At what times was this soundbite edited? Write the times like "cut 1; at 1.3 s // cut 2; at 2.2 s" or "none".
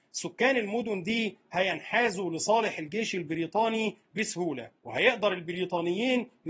cut 1; at 4.8 s